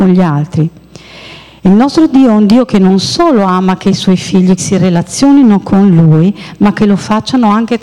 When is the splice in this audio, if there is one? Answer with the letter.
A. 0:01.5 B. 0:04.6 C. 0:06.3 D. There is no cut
B